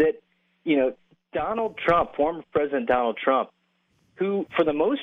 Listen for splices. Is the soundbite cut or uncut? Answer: uncut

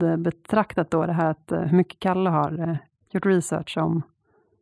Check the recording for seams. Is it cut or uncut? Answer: uncut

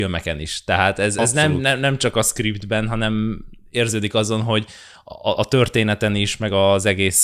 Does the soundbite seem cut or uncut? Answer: uncut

